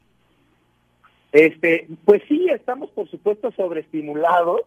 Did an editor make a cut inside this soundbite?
no; 0 cuts

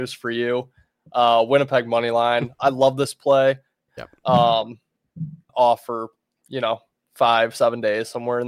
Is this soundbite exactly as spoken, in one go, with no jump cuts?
no; 2 cuts; at 3.9 s, 5.5 s

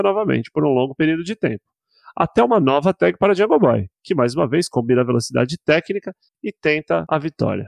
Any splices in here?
no; 0 cuts

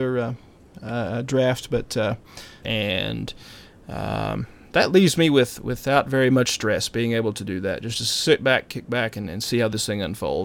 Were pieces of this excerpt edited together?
yes; 1 cut; at 2.6 s

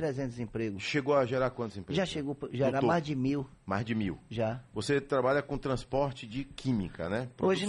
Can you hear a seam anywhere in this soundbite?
no; 0 cuts

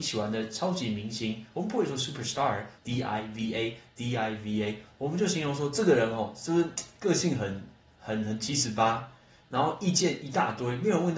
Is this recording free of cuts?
no; 1 cut; at 2.8 s

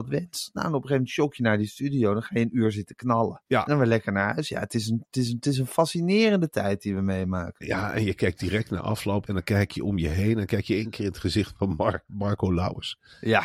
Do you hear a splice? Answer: yes; 2 cuts; at 3.5 s, 9.2 s

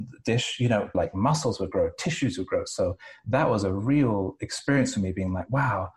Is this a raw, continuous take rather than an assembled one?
no; 1 cut; at 0.9 s

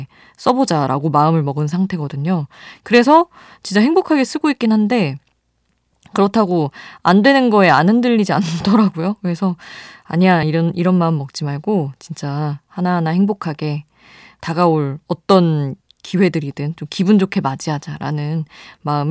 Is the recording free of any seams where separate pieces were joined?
yes; 0 cuts

